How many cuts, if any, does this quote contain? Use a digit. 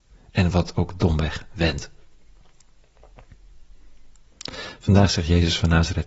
0